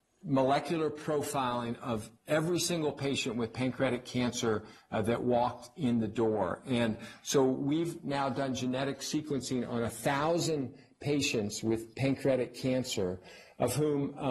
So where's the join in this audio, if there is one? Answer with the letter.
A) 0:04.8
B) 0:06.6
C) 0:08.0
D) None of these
D